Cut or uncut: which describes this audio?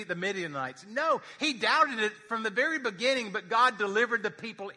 uncut